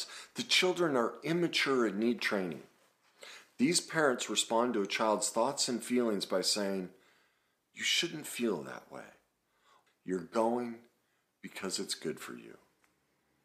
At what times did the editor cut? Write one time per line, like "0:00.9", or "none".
0:09.9

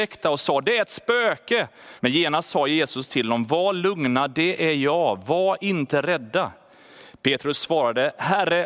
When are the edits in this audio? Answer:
0:02.0

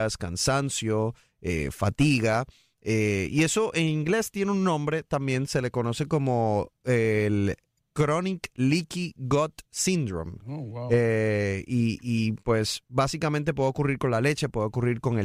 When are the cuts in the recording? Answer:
none

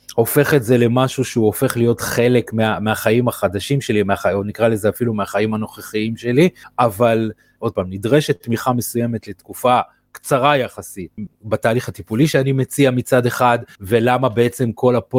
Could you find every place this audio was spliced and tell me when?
0:07.6
0:11.3

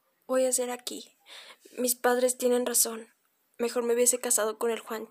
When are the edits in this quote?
none

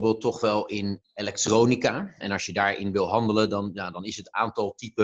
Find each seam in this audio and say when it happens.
0:02.2

